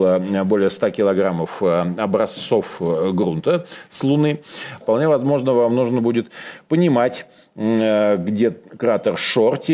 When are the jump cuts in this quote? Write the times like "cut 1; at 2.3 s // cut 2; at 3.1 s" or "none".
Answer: cut 1; at 4.8 s

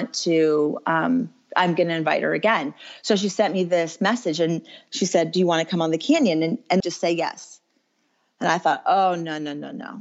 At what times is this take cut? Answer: cut 1; at 6.8 s

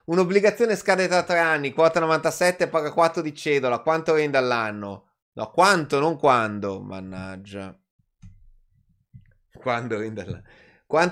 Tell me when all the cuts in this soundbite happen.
none

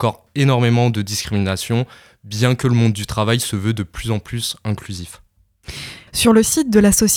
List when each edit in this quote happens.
cut 1; at 6.1 s

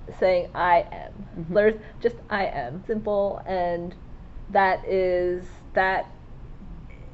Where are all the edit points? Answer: cut 1; at 1.5 s // cut 2; at 2.8 s

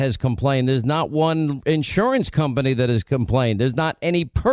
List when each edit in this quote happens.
none

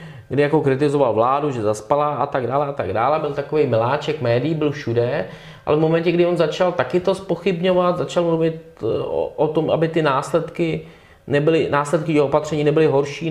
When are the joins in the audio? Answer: none

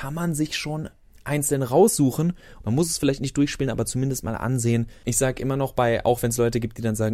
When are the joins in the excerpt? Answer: cut 1; at 2.6 s

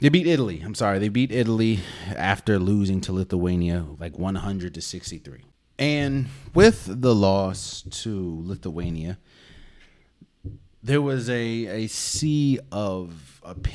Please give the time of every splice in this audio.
none

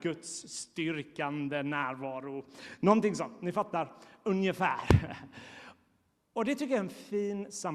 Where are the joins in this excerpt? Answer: none

